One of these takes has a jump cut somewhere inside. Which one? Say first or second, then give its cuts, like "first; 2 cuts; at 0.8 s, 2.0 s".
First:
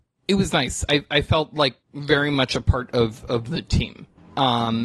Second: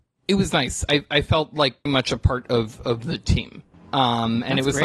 second; 1 cut; at 1.9 s